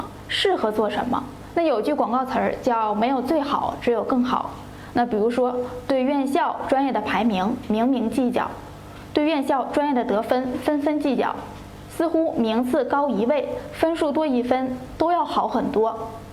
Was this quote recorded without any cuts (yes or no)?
no